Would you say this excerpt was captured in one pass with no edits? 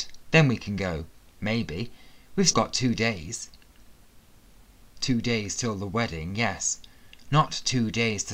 no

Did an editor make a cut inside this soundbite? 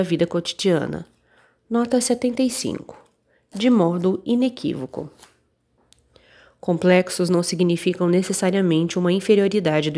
no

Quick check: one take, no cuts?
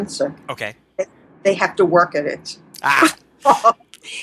yes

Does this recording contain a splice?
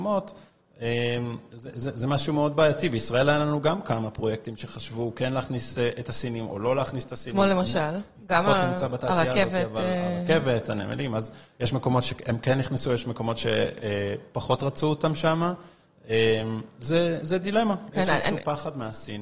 no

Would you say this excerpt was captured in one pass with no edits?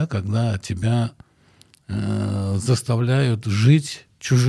yes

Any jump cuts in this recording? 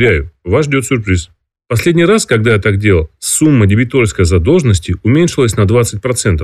no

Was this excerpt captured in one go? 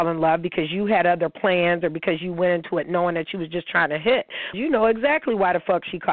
no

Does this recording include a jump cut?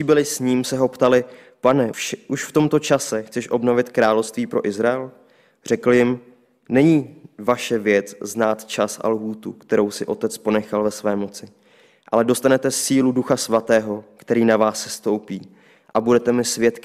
yes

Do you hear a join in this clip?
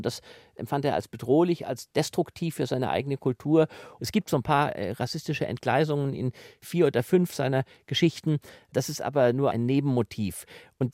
no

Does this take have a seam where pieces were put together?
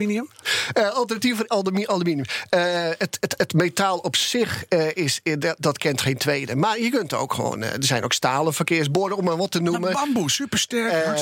no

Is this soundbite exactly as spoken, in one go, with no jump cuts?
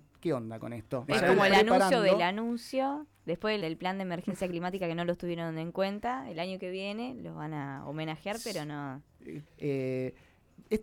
no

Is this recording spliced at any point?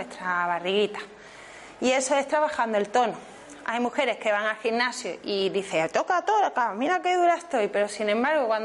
no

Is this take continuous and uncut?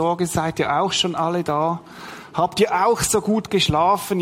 yes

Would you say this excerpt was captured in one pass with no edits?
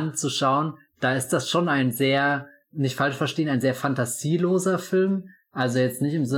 yes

